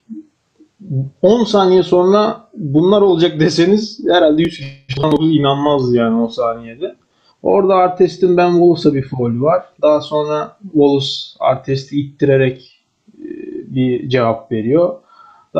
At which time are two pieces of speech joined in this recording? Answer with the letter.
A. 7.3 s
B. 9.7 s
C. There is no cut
A